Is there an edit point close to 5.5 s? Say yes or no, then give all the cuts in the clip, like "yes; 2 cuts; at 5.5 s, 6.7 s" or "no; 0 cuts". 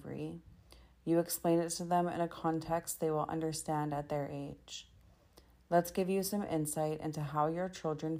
no; 0 cuts